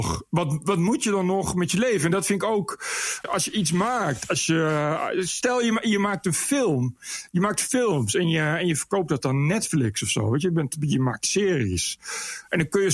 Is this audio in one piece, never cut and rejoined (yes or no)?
yes